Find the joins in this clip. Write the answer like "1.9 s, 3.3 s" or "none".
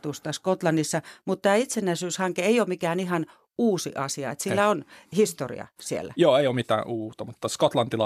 none

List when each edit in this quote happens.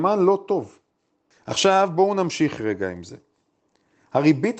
1.3 s

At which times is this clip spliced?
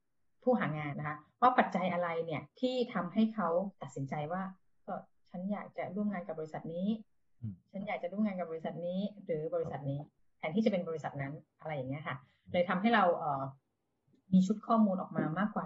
0.9 s, 2.5 s

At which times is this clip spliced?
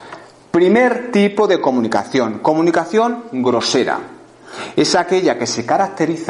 none

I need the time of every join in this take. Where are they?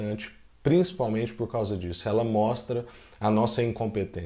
none

